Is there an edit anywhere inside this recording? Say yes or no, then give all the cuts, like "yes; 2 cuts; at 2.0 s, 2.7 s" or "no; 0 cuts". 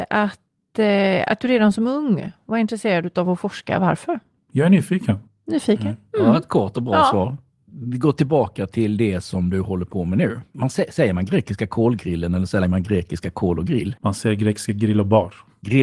no; 0 cuts